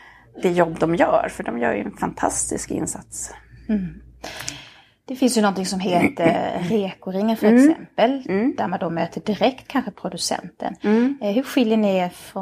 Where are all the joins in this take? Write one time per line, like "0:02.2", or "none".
none